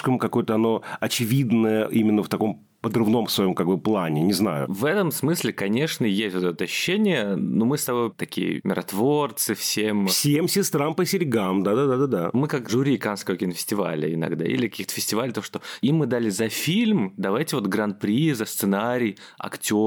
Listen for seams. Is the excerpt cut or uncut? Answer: uncut